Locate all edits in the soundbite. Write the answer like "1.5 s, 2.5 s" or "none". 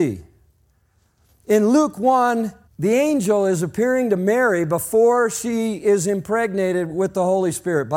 2.7 s

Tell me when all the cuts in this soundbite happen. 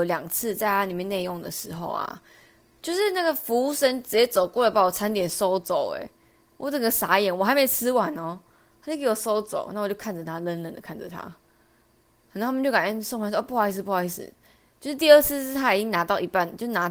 none

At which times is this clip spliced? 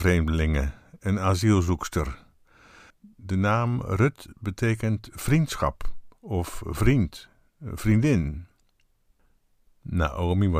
2.9 s

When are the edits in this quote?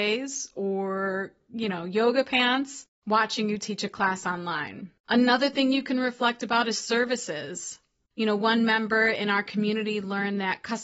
5.0 s, 8.1 s

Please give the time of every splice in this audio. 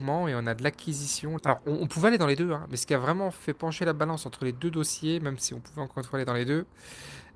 1.4 s

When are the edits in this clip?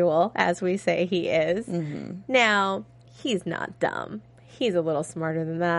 none

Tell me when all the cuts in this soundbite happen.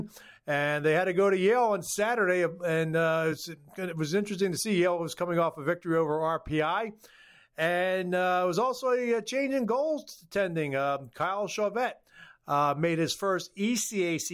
none

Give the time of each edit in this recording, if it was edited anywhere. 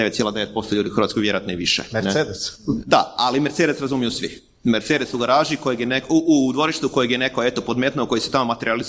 none

